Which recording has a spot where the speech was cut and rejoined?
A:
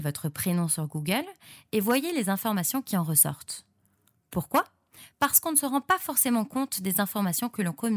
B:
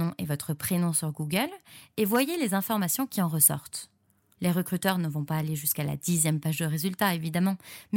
B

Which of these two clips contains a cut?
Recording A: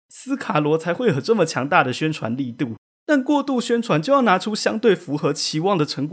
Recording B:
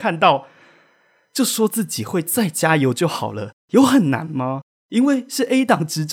B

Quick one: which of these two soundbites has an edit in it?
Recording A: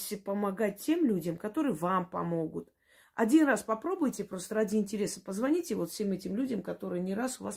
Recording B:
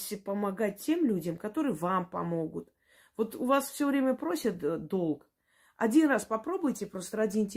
A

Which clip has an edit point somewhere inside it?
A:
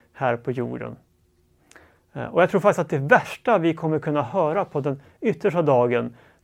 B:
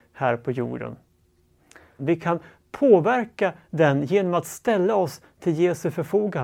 B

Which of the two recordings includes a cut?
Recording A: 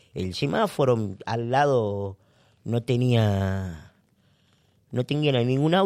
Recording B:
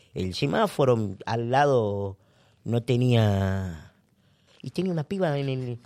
B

